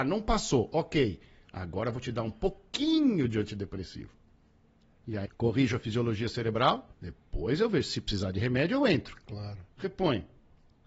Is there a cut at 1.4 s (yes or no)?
no